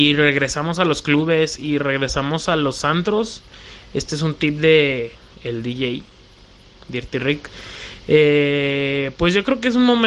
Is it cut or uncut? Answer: uncut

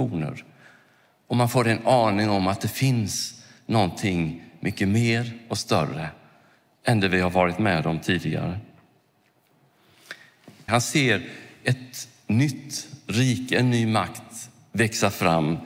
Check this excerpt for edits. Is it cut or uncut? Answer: cut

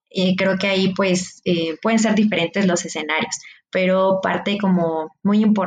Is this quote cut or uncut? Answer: uncut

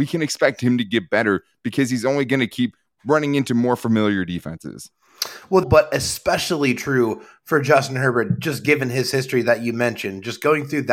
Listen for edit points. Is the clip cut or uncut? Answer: cut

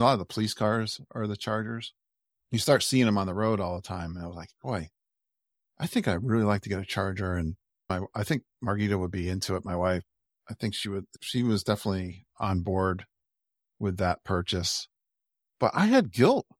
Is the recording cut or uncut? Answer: uncut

